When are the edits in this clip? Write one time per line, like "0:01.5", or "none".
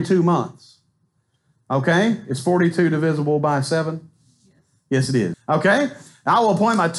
0:05.3